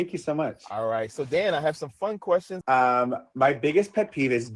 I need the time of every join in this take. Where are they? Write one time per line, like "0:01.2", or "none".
0:02.6